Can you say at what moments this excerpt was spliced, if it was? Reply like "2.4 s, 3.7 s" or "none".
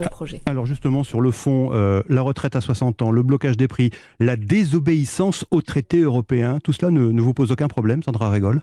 none

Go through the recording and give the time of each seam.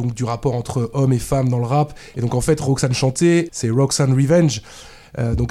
2.1 s, 3.5 s

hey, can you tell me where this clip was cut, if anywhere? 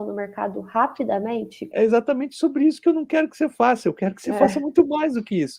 1.7 s

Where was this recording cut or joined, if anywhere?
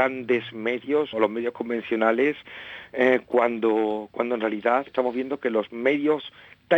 1.1 s, 4.9 s

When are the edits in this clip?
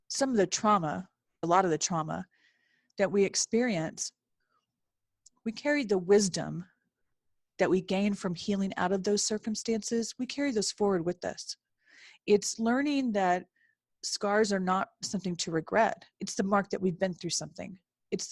1.4 s, 16.1 s

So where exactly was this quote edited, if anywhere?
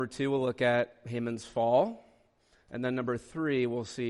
none

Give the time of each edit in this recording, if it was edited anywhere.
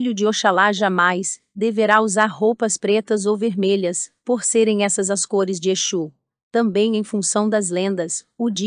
none

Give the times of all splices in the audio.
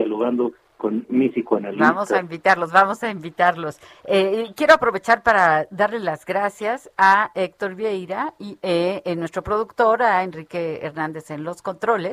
none

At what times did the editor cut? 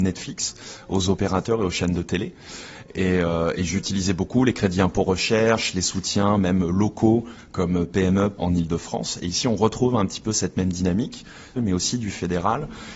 8.4 s, 11.6 s

